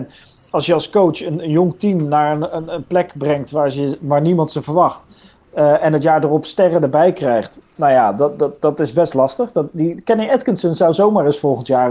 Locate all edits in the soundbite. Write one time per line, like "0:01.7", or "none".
none